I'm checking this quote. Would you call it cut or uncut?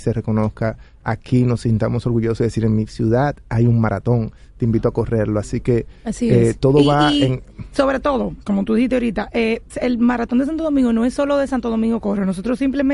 uncut